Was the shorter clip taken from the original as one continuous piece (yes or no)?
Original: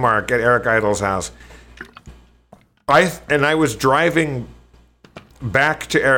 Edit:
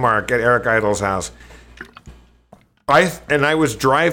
yes